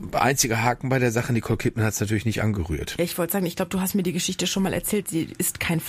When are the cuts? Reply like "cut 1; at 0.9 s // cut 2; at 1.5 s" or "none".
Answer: none